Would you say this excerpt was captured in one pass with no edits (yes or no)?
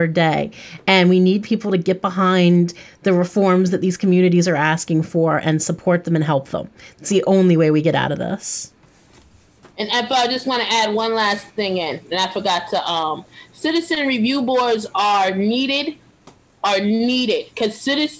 yes